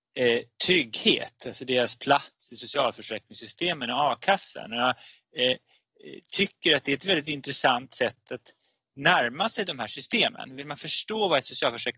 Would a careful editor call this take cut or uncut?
uncut